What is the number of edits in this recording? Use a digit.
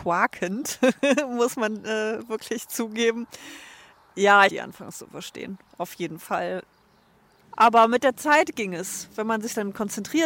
2